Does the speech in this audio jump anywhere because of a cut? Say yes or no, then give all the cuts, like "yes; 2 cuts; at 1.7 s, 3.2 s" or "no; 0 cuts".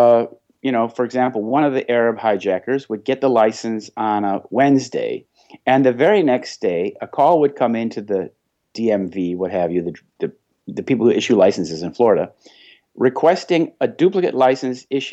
no; 0 cuts